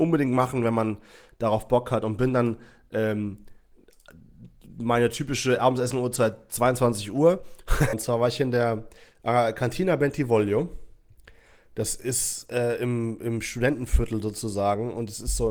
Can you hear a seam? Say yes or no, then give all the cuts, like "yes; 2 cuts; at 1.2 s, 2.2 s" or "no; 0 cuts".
yes; 1 cut; at 7.9 s